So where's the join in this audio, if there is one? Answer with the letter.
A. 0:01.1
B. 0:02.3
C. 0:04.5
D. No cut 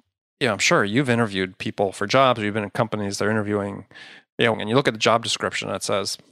C